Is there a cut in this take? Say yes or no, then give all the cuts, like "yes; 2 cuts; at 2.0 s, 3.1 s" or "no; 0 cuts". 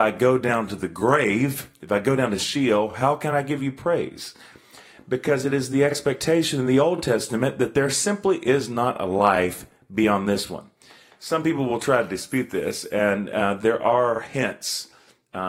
no; 0 cuts